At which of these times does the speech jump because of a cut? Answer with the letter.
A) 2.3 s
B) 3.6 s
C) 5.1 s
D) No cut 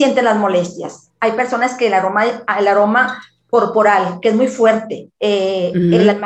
C